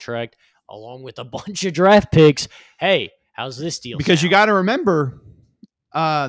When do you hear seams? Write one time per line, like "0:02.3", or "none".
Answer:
none